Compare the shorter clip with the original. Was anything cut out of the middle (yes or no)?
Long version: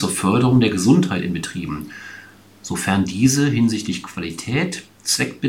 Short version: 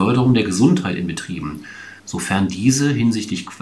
yes